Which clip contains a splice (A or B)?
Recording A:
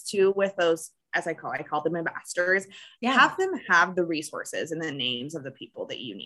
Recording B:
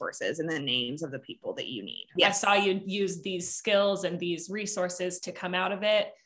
B